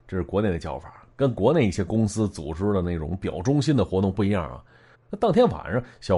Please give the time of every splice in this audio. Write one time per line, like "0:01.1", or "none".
0:04.9